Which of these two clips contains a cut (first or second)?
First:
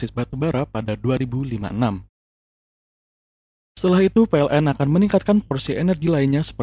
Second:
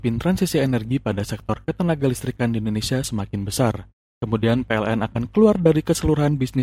second